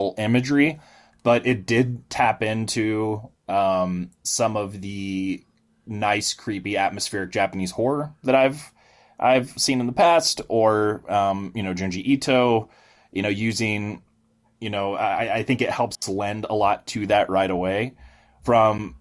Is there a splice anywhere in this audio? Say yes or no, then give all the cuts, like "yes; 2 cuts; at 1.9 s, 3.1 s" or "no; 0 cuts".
no; 0 cuts